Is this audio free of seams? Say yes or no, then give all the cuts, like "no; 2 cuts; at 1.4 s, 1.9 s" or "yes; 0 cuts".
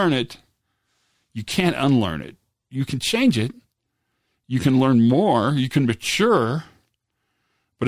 yes; 0 cuts